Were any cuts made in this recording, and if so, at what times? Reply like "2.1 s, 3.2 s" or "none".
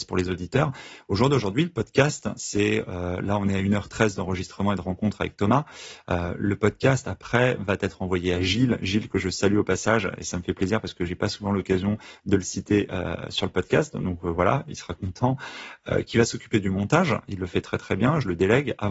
none